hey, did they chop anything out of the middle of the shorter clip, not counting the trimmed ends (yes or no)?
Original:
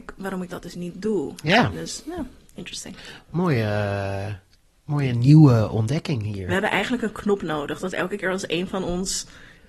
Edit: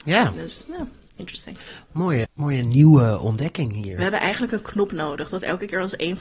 yes